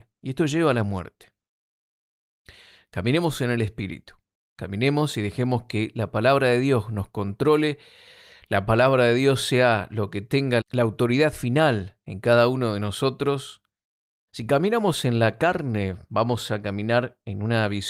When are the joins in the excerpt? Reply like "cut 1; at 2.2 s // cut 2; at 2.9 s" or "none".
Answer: cut 1; at 10.6 s // cut 2; at 14.3 s